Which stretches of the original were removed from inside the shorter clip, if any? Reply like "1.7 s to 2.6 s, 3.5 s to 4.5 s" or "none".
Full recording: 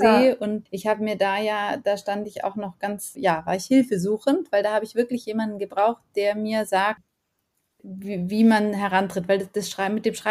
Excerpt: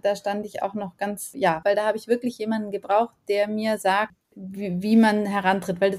3.4 s to 4.5 s, 7.1 s to 7.7 s